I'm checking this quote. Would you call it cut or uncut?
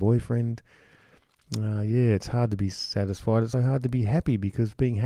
cut